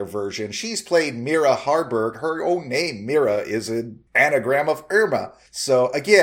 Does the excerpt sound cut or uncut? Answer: uncut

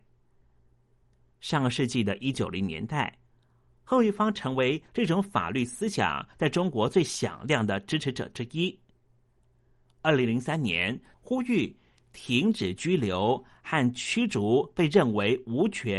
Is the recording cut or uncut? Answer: cut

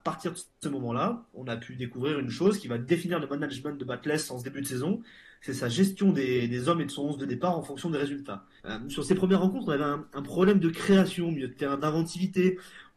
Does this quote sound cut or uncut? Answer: cut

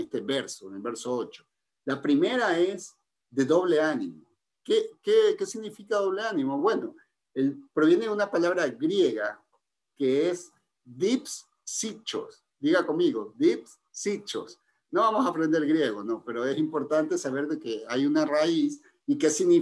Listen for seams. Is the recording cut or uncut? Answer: uncut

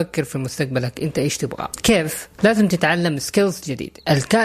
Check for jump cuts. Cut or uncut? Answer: cut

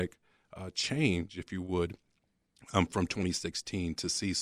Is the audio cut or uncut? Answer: uncut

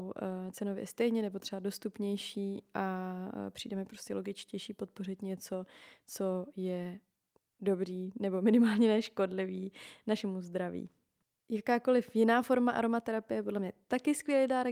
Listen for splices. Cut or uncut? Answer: uncut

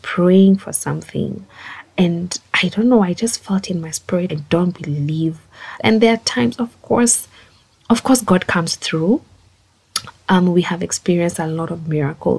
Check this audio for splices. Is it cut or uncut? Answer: cut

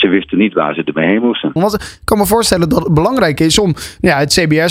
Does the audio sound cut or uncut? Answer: cut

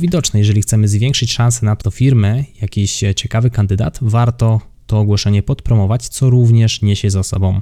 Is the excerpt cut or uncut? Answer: cut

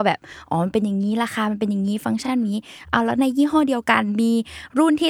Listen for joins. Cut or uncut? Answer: uncut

